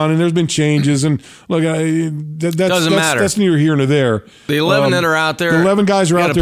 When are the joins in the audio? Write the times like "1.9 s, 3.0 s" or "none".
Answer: none